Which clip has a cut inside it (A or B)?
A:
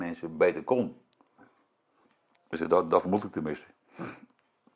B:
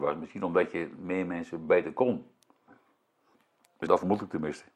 B